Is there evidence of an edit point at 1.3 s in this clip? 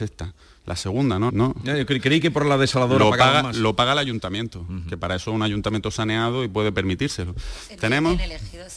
yes; 1 cut; at 1.3 s

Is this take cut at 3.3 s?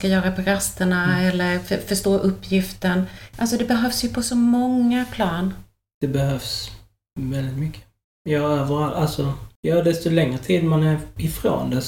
yes; 1 cut; at 3.3 s

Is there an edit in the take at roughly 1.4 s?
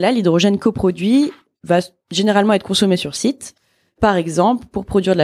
no; 0 cuts

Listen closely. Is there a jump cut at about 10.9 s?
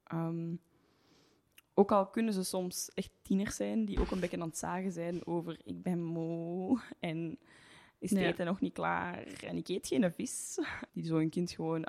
yes; 1 cut; at 10.9 s

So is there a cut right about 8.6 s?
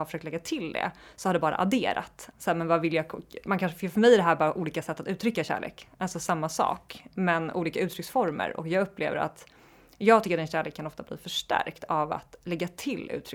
no; 1 cut; at 2.3 s

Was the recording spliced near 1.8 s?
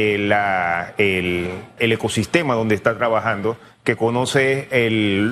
yes; 1 cut; at 1.8 s

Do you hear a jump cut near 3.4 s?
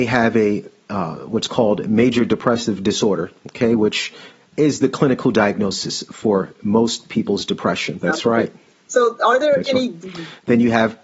no; 2 cuts; at 8.0 s, 10.0 s

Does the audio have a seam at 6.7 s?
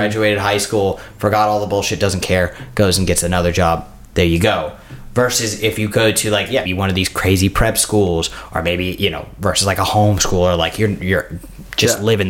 yes; 1 cut; at 6.7 s

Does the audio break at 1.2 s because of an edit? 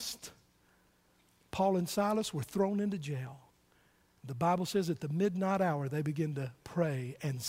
no; 0 cuts

